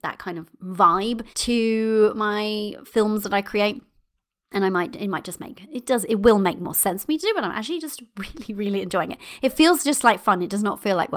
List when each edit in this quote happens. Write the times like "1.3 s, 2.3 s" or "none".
1.3 s